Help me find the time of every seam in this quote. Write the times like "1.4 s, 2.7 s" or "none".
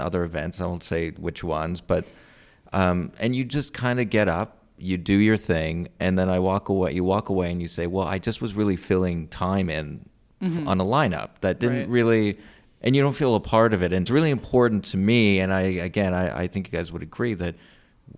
none

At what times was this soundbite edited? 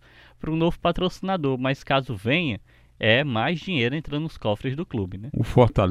none

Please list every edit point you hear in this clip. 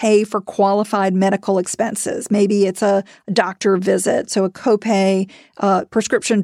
none

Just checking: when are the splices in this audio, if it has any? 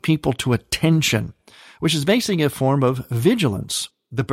none

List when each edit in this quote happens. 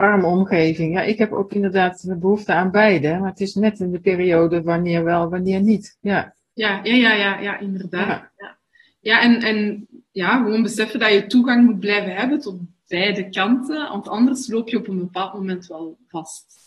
none

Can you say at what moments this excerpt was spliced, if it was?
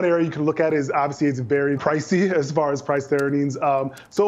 1.8 s

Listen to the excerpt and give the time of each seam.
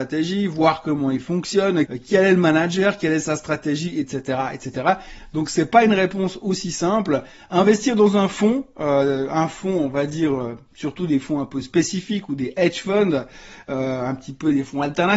1.8 s

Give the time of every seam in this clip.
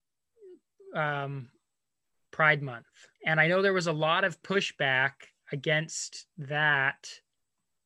3.2 s

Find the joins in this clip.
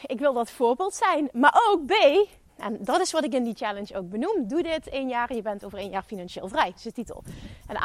2.5 s

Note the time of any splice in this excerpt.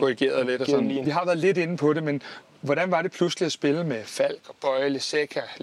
1.0 s

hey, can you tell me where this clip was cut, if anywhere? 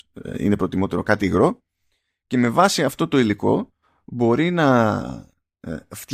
none

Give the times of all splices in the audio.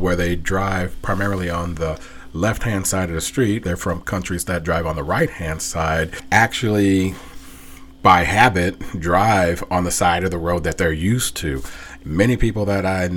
3.6 s, 12.0 s

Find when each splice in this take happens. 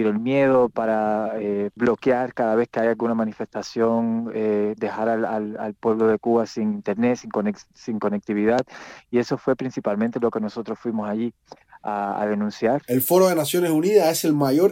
1.8 s

